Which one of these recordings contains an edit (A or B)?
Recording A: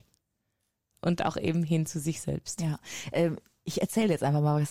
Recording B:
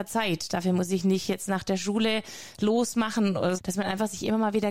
B